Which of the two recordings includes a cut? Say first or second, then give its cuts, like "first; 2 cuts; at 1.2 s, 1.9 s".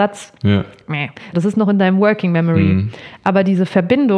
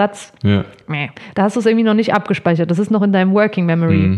first; 1 cut; at 1.3 s